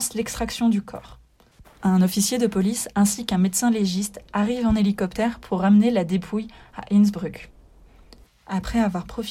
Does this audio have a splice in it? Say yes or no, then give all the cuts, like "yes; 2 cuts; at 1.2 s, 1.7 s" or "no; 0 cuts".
yes; 1 cut; at 8.3 s